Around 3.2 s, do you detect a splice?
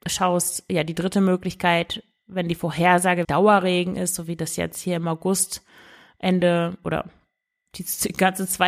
yes; 1 cut; at 3.2 s

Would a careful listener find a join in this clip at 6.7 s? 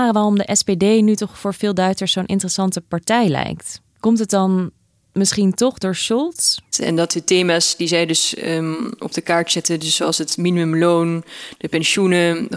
yes; 1 cut; at 6.7 s

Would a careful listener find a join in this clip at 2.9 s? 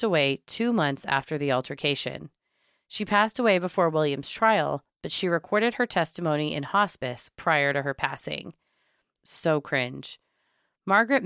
no; 1 cut; at 9.2 s

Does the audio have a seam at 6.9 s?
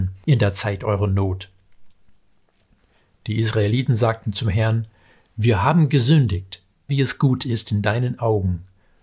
yes; 1 cut; at 6.9 s

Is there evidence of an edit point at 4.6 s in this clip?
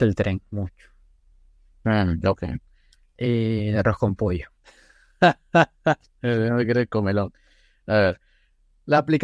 yes; 2 cuts; at 3.0 s, 4.6 s

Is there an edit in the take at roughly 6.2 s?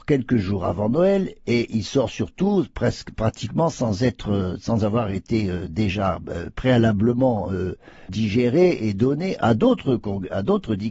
no; 1 cut; at 8.1 s

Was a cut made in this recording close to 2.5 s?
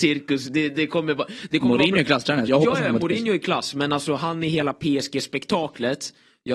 yes; 1 cut; at 2.5 s

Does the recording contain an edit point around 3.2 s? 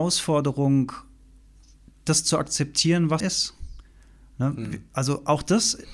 yes; 1 cut; at 3.2 s

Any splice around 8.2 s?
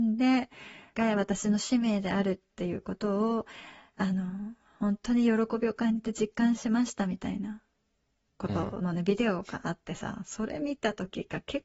no; 1 cut; at 0.9 s

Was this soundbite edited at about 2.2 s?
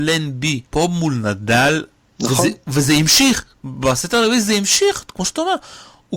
yes; 1 cut; at 2.2 s

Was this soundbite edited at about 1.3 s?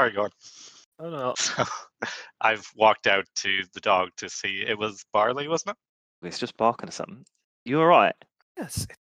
yes; 2 cuts; at 1.3 s, 6.2 s

